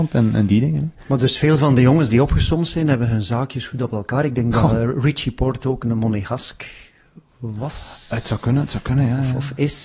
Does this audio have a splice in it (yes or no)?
no